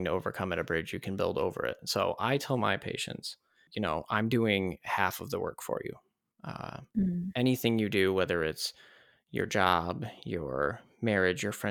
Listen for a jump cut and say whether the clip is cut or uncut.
uncut